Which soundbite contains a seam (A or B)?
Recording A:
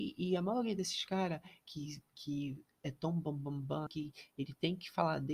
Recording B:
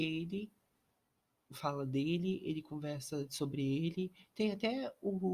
A